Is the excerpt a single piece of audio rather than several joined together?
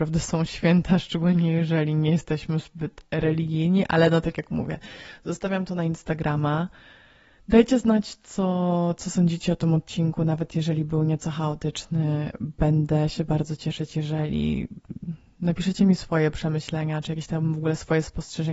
yes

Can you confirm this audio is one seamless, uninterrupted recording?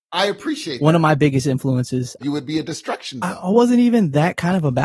no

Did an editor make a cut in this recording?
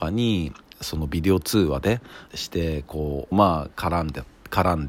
yes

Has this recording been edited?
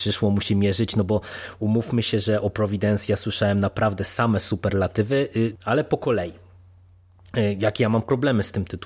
yes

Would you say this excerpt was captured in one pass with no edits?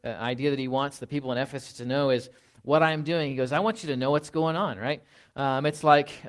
yes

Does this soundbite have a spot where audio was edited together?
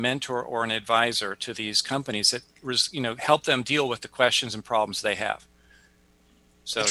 no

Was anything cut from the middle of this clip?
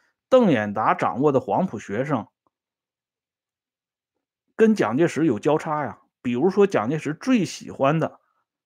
no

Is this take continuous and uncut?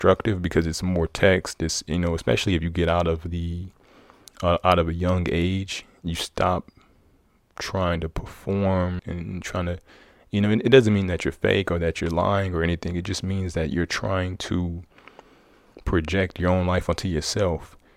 no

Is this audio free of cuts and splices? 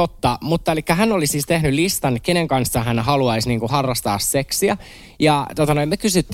yes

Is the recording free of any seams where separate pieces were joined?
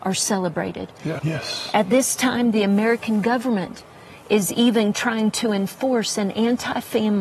no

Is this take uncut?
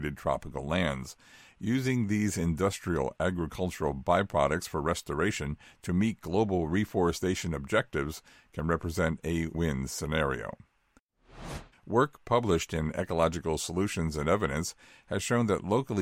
no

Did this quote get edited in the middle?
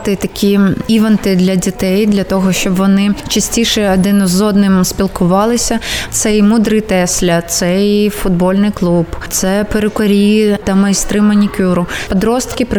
yes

